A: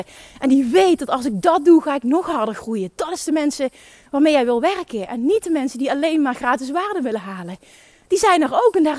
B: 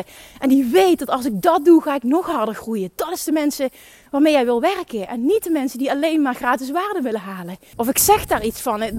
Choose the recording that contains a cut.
B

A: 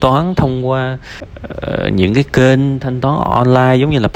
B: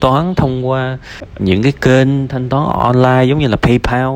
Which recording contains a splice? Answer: B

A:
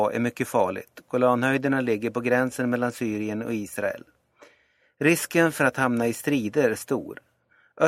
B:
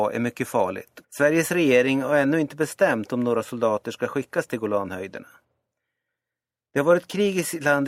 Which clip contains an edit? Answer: B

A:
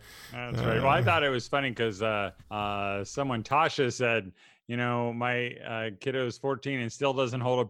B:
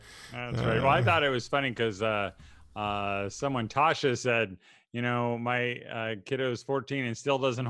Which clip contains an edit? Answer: A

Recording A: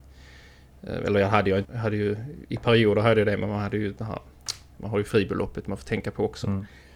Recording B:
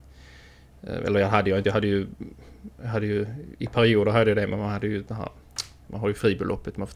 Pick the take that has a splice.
A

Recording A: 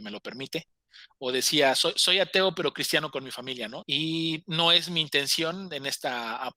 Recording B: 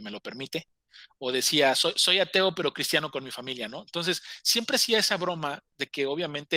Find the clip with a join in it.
A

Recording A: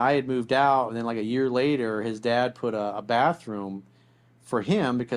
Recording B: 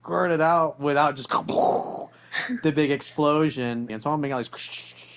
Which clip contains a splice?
B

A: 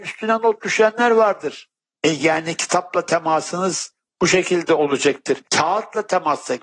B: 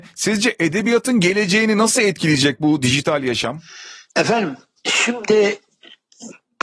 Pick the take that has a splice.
A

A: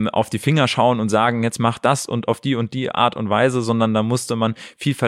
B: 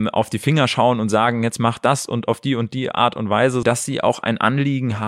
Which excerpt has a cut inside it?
B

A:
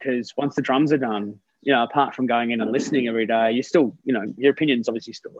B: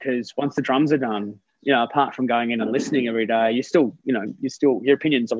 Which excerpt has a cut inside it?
A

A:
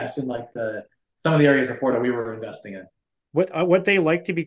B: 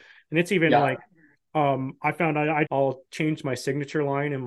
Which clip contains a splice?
B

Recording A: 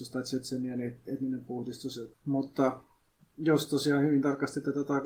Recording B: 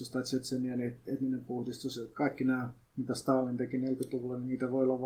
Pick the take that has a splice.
A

